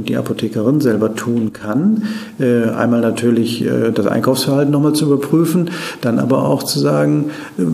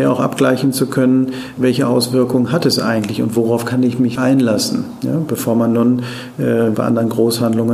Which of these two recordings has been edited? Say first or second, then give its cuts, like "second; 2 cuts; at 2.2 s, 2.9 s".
second; 2 cuts; at 4.2 s, 6.7 s